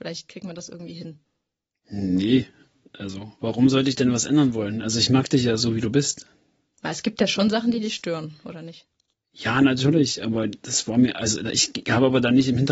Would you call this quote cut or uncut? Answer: uncut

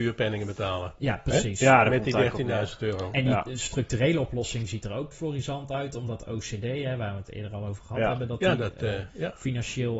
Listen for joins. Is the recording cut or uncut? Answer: cut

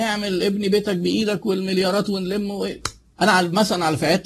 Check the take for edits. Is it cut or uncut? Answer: cut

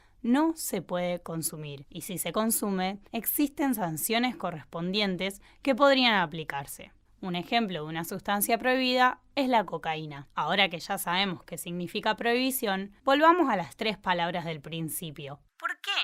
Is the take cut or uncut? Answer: uncut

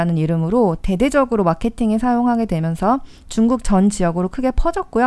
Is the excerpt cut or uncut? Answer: uncut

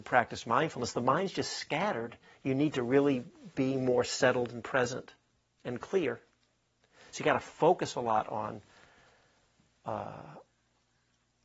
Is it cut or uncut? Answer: uncut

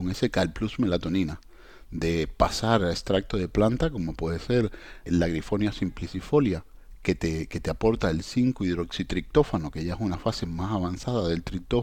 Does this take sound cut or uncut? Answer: cut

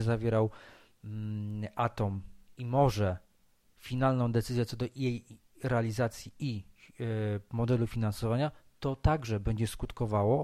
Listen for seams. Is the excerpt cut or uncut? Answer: uncut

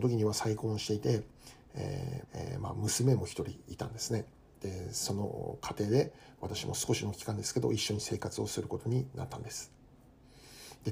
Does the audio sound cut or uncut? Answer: cut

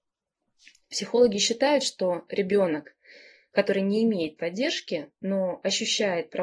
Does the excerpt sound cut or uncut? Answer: uncut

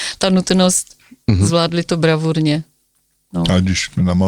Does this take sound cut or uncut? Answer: uncut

